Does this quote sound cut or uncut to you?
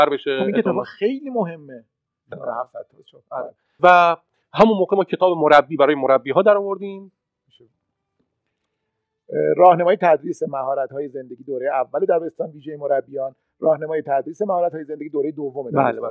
cut